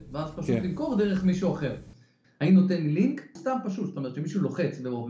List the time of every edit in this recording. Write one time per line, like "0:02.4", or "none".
0:02.2
0:03.4